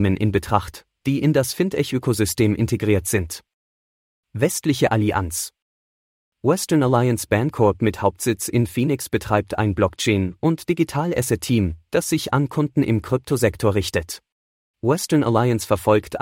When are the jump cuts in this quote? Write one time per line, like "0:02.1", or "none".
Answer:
0:14.7